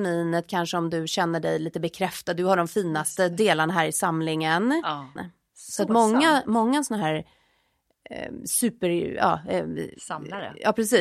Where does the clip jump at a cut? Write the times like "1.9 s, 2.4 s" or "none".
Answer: 5.2 s